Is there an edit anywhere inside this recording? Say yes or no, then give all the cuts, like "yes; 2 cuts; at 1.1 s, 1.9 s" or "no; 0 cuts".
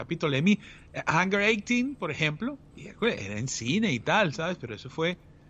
yes; 1 cut; at 2.7 s